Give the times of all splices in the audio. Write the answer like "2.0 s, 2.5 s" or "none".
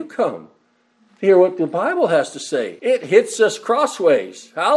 2.8 s